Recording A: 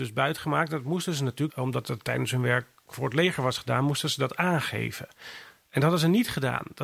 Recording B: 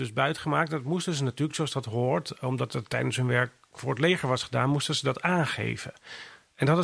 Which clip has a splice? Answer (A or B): A